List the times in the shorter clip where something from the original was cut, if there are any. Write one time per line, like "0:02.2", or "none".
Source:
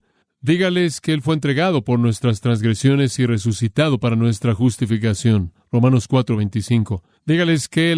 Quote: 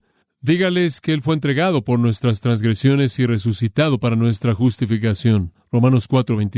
none